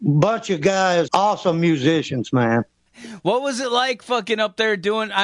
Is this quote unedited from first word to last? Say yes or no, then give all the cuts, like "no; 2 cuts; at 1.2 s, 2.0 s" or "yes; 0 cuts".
no; 2 cuts; at 1.1 s, 2.9 s